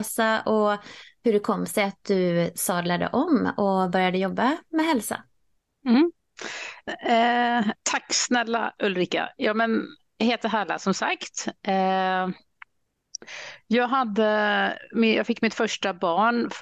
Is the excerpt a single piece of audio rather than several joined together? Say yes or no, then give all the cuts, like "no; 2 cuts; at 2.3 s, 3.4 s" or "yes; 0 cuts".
no; 1 cut; at 6.9 s